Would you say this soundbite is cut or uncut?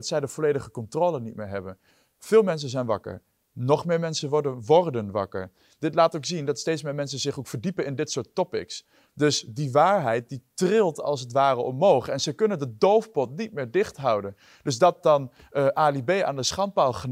uncut